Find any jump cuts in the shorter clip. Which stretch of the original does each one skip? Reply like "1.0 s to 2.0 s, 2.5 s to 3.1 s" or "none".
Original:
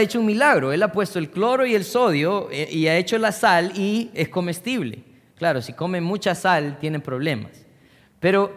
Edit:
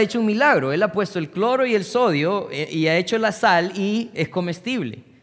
none